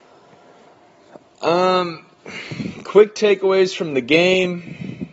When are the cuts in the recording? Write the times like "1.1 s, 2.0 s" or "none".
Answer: none